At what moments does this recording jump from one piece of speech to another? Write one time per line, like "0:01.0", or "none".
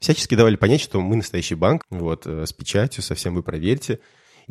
0:01.8